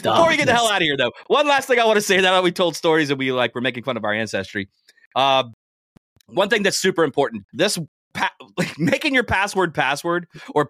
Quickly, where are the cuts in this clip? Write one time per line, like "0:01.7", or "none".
0:07.5